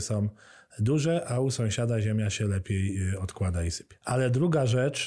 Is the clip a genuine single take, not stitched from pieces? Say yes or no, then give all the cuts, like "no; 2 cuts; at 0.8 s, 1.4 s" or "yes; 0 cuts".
no; 1 cut; at 4.0 s